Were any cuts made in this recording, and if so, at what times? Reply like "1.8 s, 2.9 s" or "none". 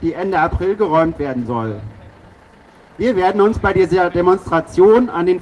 none